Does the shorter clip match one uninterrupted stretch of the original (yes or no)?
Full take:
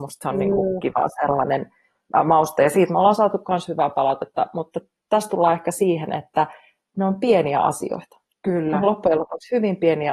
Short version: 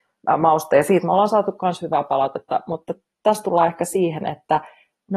yes